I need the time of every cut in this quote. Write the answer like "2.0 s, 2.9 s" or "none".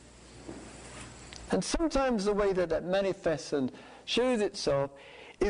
1.5 s